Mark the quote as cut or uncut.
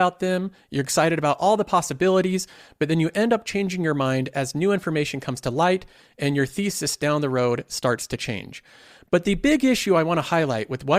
uncut